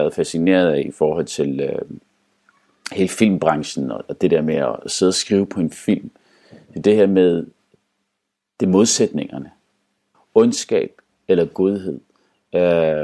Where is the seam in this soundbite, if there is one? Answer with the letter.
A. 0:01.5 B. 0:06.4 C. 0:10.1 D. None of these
C